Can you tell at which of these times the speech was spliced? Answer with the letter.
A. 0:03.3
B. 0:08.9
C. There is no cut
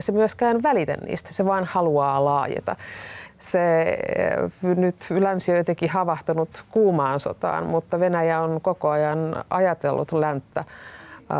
A